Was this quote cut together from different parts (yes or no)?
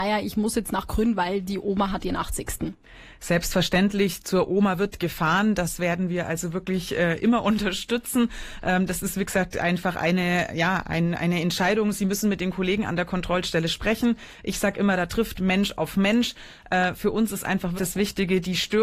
yes